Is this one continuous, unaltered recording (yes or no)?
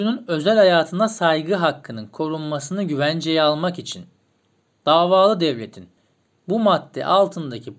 yes